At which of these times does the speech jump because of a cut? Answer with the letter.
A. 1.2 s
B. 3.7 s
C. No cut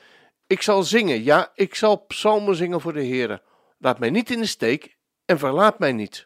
B